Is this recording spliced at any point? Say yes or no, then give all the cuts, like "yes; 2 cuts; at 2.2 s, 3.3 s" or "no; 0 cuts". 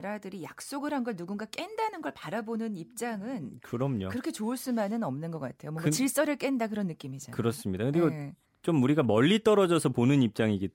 no; 0 cuts